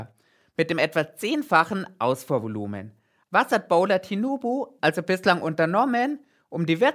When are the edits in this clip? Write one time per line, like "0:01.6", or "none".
0:03.2
0:04.8